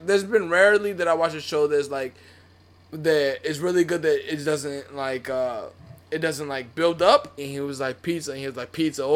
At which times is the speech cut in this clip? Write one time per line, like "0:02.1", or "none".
0:07.4